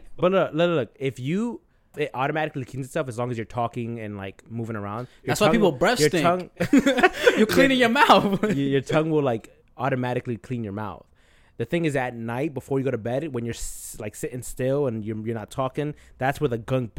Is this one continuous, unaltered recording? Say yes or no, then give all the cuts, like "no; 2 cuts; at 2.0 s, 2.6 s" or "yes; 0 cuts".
no; 1 cut; at 1.9 s